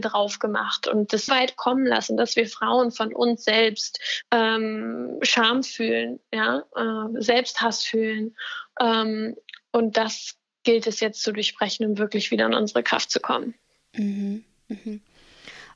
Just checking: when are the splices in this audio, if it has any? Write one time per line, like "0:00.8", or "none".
0:01.3
0:04.2